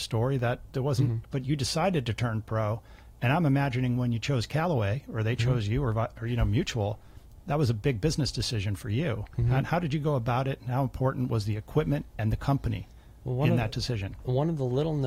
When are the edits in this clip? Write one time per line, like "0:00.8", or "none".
0:01.2